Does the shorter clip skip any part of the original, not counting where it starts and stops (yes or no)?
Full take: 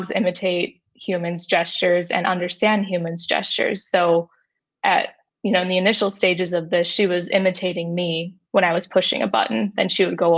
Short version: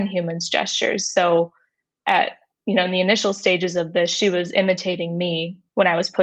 no